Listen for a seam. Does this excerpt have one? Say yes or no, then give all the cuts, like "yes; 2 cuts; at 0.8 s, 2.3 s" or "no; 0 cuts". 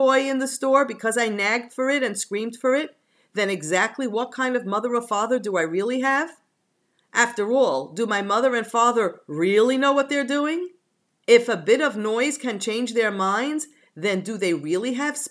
no; 0 cuts